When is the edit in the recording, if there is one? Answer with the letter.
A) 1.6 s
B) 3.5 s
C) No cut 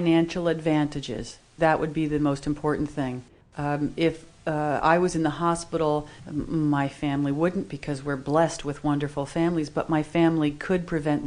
A